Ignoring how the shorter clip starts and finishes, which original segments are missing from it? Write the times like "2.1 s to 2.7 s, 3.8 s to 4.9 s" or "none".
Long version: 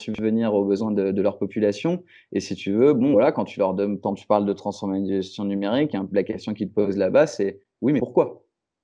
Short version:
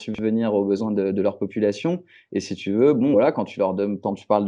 none

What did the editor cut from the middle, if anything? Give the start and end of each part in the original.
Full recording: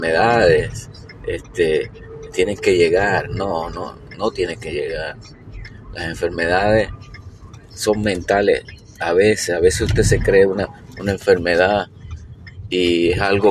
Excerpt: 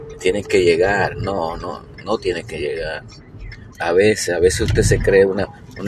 5.9 s to 8.9 s

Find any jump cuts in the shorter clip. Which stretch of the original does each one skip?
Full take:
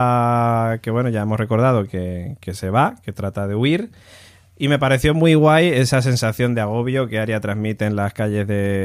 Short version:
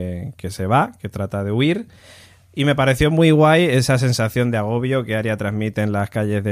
none

